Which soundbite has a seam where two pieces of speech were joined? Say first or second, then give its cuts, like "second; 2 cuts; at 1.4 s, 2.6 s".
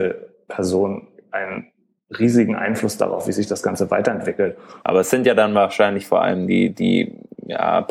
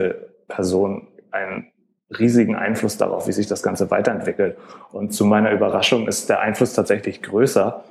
first; 1 cut; at 4.8 s